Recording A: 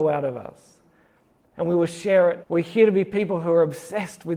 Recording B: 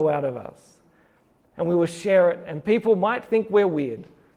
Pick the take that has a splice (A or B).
A